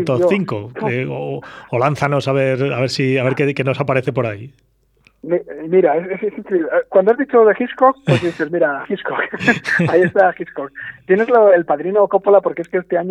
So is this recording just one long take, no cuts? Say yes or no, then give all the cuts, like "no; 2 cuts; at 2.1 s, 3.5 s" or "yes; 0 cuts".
yes; 0 cuts